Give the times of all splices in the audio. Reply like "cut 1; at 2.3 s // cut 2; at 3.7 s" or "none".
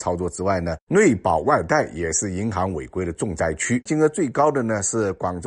cut 1; at 3.9 s